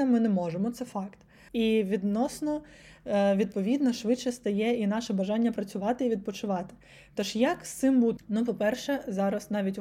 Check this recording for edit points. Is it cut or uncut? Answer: cut